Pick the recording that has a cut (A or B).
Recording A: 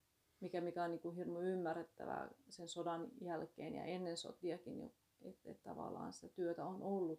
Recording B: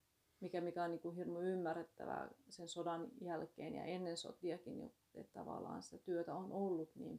B